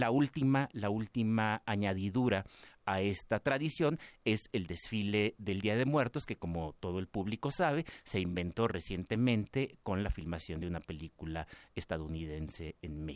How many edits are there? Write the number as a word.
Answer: zero